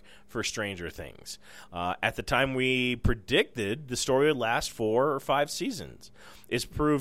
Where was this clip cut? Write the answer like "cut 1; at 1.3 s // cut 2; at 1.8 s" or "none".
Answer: none